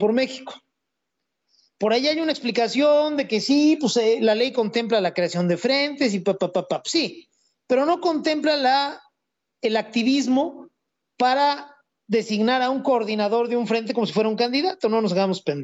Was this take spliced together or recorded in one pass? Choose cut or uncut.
uncut